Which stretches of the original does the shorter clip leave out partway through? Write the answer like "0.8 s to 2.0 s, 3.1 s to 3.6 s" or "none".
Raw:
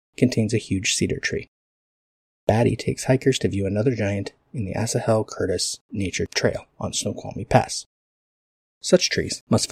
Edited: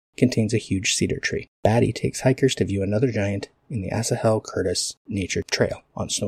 1.5 s to 2.4 s